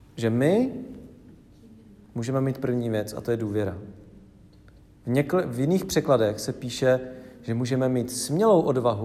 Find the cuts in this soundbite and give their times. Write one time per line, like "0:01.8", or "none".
none